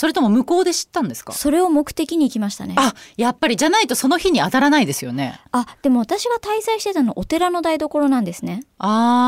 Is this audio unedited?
yes; 0 cuts

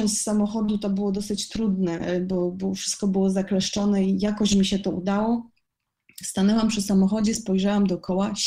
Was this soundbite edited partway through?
no; 0 cuts

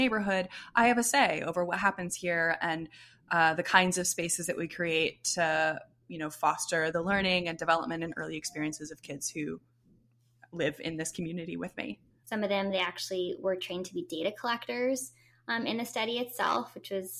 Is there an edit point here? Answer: yes; 1 cut; at 12.2 s

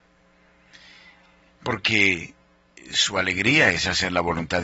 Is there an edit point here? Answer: no; 0 cuts

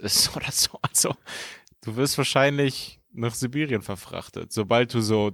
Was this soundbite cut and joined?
no; 0 cuts

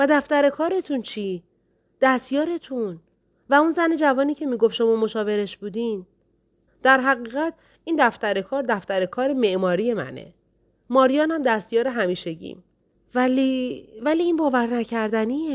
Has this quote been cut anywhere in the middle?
yes; 2 cuts; at 6.7 s, 13.0 s

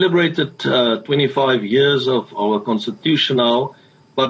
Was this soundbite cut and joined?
no; 0 cuts

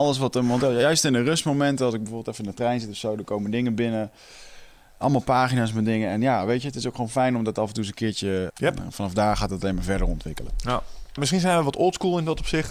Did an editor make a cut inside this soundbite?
yes; 2 cuts; at 8.5 s, 11.2 s

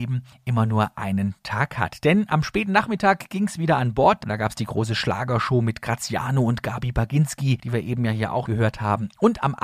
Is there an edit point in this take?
yes; 2 cuts; at 4.2 s, 8.4 s

